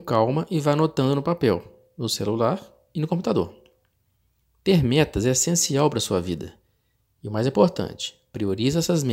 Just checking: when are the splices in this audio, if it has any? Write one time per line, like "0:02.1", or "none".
none